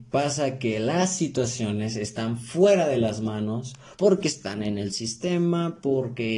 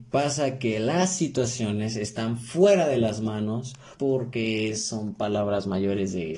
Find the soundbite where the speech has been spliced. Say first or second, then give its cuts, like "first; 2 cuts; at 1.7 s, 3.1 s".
second; 1 cut; at 4.0 s